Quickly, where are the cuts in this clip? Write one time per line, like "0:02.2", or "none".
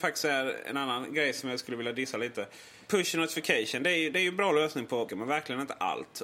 0:05.1